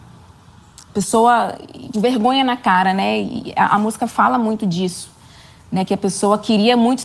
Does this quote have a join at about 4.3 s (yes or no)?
no